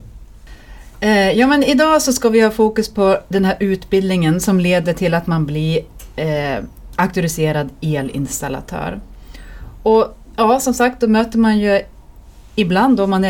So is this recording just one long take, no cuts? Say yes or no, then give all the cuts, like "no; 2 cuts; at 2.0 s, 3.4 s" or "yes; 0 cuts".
yes; 0 cuts